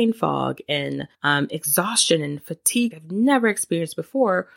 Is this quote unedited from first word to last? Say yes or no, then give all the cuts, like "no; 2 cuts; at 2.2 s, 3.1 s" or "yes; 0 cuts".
no; 2 cuts; at 1.1 s, 2.9 s